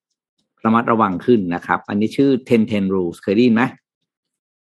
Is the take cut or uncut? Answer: cut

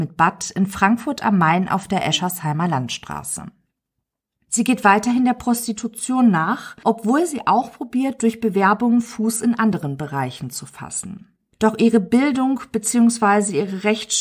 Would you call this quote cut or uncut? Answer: uncut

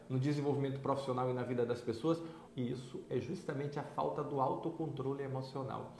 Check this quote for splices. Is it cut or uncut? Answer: cut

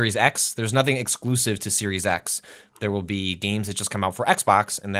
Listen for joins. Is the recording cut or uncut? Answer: uncut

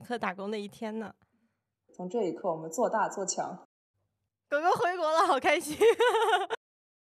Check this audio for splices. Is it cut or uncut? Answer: cut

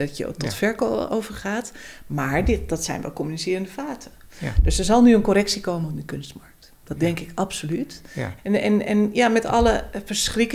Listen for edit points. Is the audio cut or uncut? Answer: cut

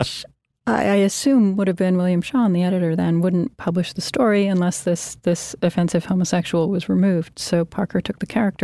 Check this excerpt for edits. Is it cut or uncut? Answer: uncut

